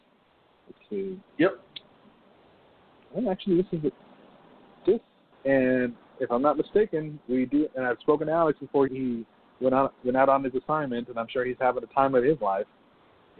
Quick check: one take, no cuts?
no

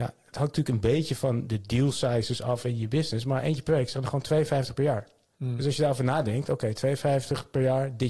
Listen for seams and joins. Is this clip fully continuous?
no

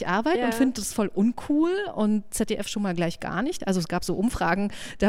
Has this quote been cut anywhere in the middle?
yes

